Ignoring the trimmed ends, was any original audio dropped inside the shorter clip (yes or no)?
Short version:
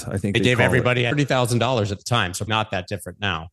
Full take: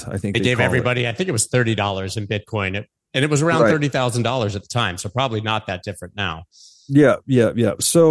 yes